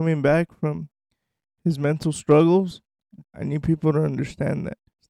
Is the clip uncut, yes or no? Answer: no